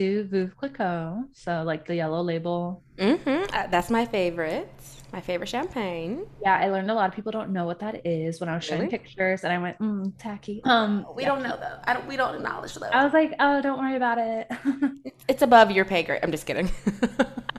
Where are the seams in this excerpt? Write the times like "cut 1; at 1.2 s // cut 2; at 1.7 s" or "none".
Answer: cut 1; at 10.6 s